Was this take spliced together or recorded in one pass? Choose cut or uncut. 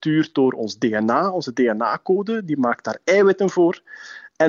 uncut